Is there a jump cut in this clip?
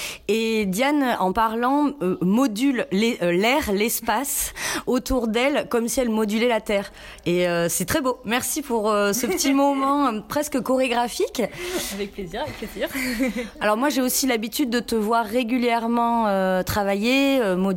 no; 0 cuts

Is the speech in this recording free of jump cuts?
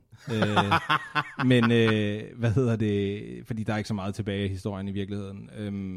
yes; 0 cuts

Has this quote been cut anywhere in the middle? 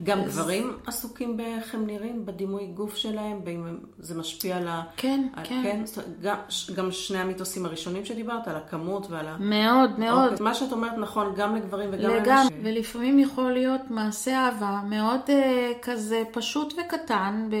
yes; 2 cuts; at 10.4 s, 12.5 s

